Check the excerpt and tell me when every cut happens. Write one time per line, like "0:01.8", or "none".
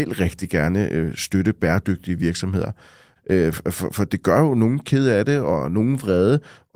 0:03.2